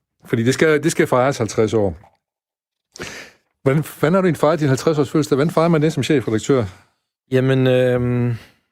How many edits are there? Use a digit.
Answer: 0